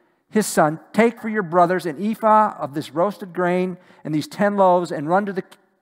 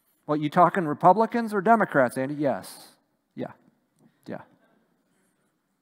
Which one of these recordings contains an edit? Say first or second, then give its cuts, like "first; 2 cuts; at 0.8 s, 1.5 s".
first; 1 cut; at 1.2 s